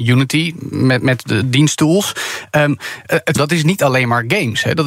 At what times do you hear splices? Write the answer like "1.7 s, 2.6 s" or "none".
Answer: 3.3 s